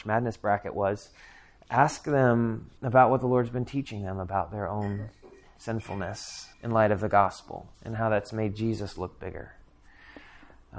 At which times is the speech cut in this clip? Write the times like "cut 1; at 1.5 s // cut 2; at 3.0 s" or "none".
cut 1; at 2.8 s // cut 2; at 6.5 s // cut 3; at 7.7 s

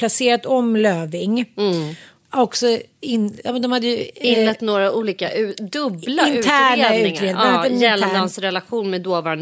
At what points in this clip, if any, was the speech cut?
none

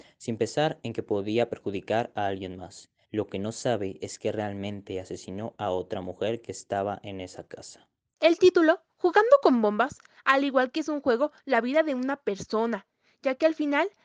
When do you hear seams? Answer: cut 1; at 3.0 s // cut 2; at 8.2 s // cut 3; at 10.2 s

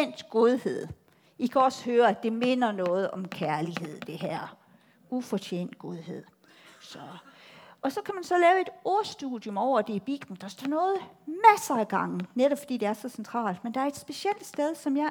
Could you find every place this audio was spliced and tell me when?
none

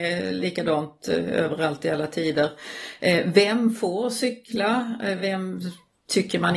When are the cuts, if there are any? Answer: none

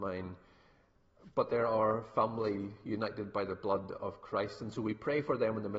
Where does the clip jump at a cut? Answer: none

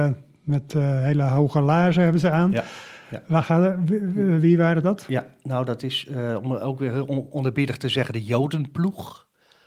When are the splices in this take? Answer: none

